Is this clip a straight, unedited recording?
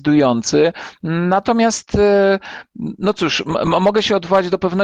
yes; 0 cuts

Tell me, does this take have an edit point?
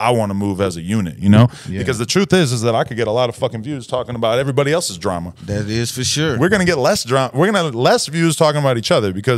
no; 0 cuts

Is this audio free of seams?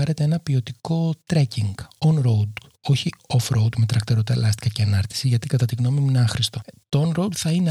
yes; 0 cuts

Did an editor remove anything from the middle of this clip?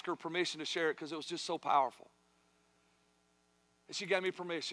no; 0 cuts

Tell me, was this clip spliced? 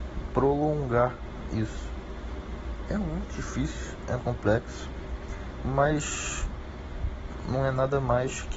yes; 2 cuts; at 4.2 s, 5.6 s

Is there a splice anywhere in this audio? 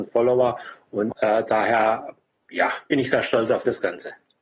yes; 1 cut; at 1.1 s

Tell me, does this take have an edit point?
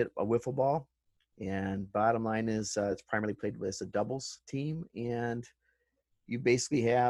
no; 0 cuts

